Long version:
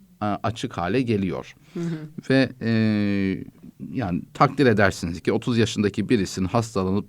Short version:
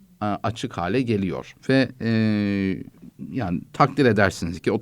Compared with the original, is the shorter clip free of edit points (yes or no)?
no